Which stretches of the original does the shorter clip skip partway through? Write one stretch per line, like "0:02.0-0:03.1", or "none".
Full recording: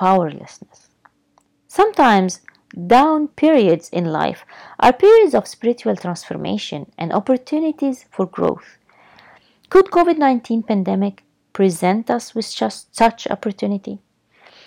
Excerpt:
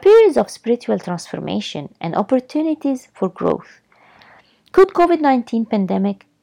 none